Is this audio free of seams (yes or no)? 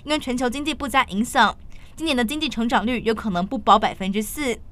yes